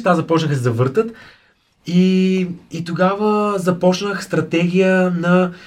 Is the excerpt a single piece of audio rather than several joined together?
yes; 0 cuts

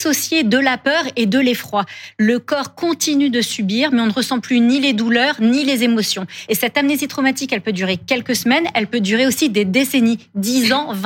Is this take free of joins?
yes; 0 cuts

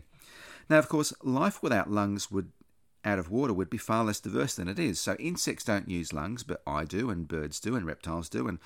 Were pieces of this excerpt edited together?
no; 0 cuts

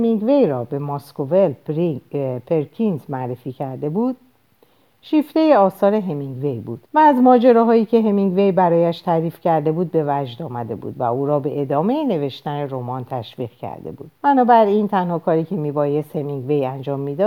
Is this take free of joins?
no; 2 cuts; at 6.9 s, 14.2 s

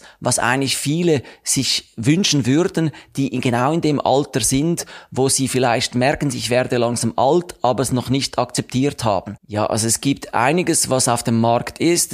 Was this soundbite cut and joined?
yes; 1 cut; at 9.4 s

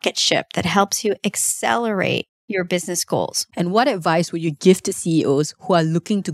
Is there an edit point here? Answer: yes; 1 cut; at 3.5 s

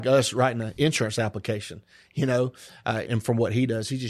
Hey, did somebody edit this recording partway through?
yes; 1 cut; at 3.1 s

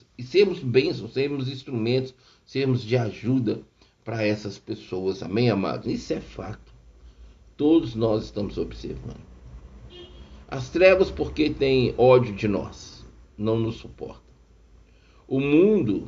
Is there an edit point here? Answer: yes; 1 cut; at 5.8 s

